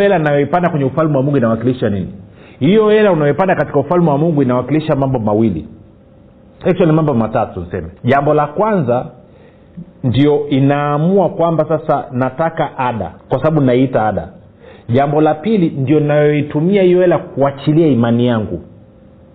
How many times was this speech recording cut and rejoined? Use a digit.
2